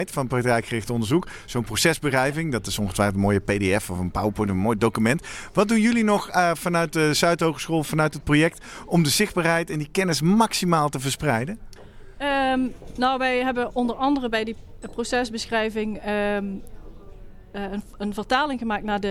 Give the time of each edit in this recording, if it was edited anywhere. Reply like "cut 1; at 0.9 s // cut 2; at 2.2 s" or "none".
none